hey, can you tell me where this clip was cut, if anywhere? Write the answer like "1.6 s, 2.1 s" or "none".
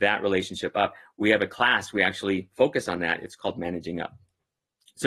none